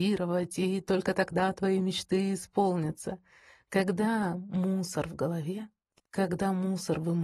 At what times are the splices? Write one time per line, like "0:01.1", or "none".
none